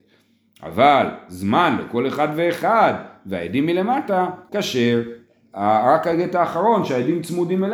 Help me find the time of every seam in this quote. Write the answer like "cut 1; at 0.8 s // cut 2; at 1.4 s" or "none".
cut 1; at 4.5 s